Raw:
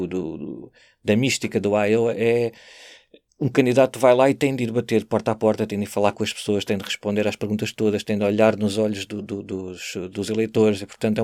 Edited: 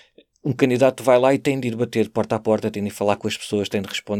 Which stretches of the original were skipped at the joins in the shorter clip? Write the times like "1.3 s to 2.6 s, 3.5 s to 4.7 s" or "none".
none